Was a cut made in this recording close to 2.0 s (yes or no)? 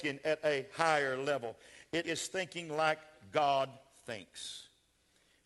yes